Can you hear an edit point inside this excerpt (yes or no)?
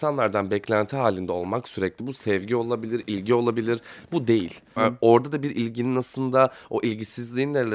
yes